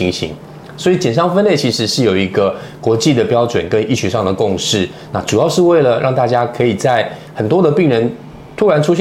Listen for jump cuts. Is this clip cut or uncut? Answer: uncut